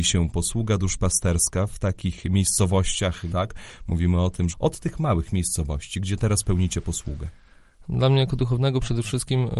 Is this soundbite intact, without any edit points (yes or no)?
no